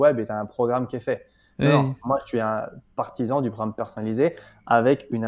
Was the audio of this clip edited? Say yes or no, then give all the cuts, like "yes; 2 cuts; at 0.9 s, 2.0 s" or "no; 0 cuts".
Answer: no; 0 cuts